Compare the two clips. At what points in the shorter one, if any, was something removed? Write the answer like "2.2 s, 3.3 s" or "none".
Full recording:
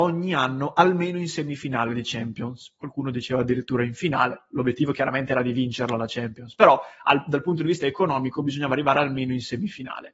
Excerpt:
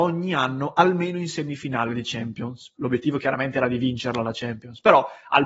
2.7 s